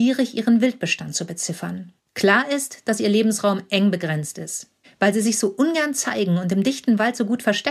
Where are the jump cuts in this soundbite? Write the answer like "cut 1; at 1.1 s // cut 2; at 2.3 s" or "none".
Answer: cut 1; at 2.0 s // cut 2; at 4.8 s